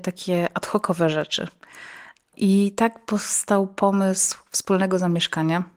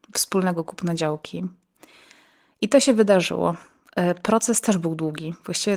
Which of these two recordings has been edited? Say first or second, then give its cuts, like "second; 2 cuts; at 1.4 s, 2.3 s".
first; 1 cut; at 2.3 s